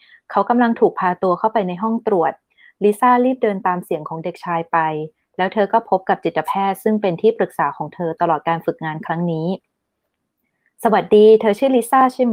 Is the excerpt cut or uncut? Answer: uncut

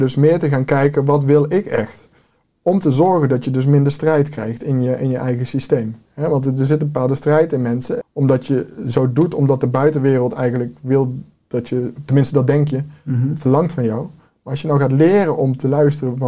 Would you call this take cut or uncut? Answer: cut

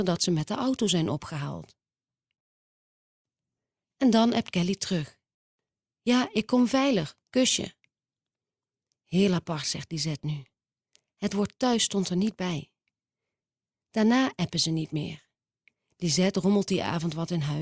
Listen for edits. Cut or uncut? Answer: uncut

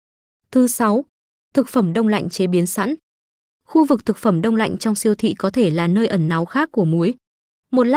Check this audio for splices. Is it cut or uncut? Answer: uncut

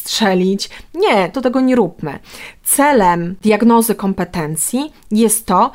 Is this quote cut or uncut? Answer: cut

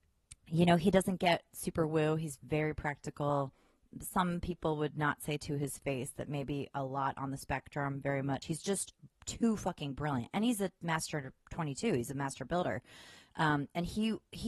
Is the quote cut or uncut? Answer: uncut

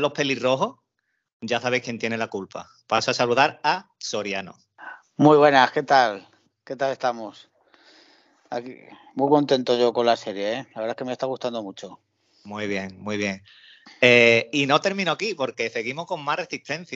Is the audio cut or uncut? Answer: uncut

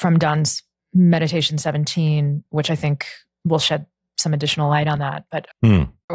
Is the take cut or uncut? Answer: uncut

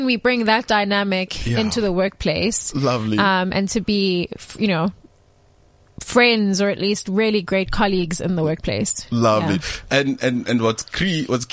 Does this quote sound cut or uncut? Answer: uncut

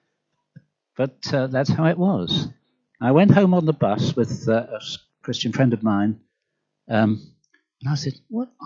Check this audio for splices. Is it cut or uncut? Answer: cut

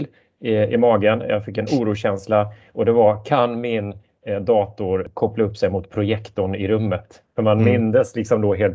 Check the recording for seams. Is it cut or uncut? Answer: uncut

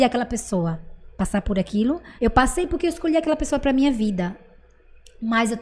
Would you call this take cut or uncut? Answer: cut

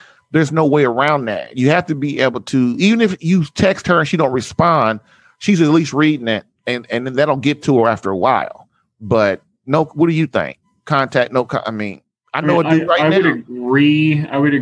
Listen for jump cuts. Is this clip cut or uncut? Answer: uncut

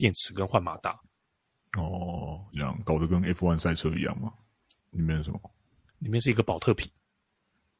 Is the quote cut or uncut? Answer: cut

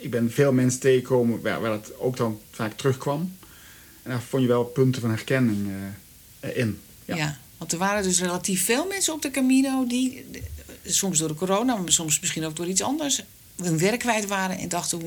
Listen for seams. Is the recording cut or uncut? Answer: uncut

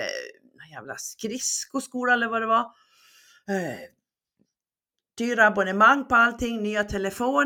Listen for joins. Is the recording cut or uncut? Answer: uncut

